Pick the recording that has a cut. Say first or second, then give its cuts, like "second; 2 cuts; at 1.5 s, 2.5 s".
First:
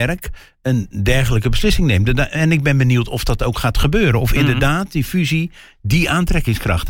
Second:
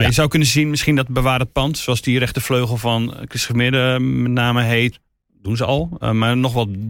second; 1 cut; at 4.9 s